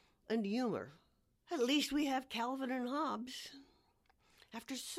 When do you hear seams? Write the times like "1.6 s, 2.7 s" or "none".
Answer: 1.4 s